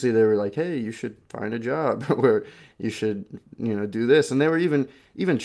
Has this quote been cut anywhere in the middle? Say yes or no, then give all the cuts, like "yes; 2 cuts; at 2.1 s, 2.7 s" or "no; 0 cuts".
no; 0 cuts